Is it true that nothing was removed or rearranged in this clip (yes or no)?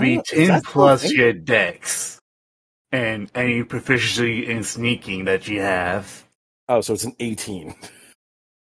yes